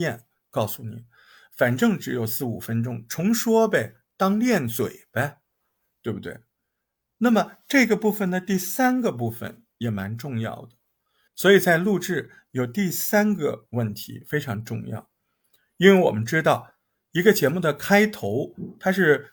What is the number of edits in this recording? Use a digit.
1